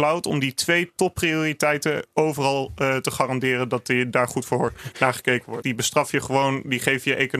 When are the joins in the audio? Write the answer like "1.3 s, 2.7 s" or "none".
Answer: 5.6 s